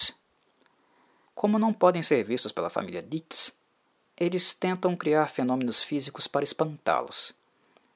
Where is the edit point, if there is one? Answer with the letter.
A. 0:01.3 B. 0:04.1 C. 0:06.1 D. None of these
A